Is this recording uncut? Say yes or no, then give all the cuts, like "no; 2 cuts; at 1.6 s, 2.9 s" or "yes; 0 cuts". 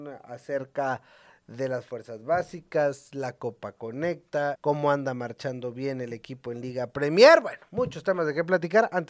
no; 1 cut; at 4.6 s